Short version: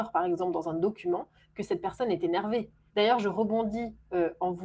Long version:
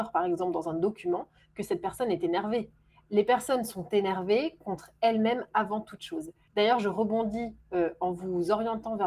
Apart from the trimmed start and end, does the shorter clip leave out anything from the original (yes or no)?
yes